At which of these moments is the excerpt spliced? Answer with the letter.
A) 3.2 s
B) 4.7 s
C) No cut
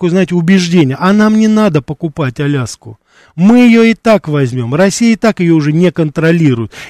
C